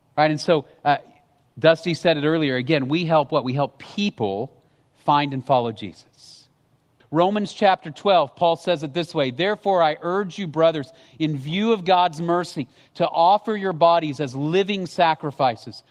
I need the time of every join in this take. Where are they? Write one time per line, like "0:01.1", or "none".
0:07.0